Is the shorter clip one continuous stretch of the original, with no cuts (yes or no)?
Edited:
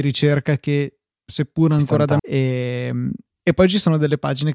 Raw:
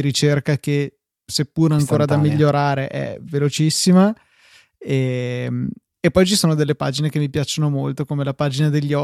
no